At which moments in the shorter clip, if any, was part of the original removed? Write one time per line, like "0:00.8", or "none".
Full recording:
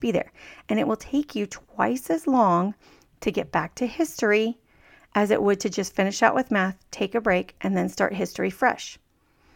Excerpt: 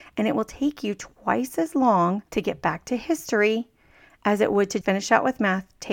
0:02.3
0:04.8